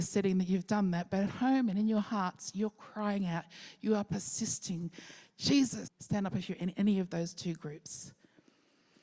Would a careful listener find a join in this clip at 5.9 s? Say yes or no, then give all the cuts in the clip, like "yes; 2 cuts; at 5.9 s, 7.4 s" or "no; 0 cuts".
yes; 1 cut; at 5.9 s